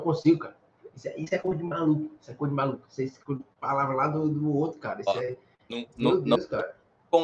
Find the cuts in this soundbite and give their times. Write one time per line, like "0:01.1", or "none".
none

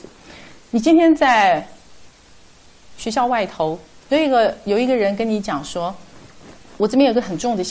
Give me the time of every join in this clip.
0:04.0
0:06.8

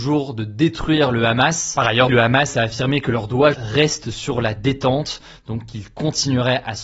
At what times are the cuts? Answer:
0:02.1
0:03.5

